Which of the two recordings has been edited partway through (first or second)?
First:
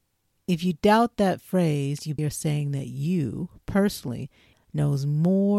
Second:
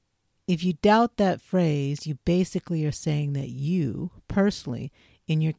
first